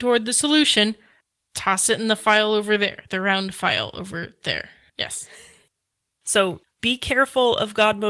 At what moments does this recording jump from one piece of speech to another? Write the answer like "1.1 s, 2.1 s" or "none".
4.9 s